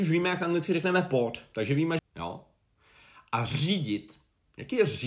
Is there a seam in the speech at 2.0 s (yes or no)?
yes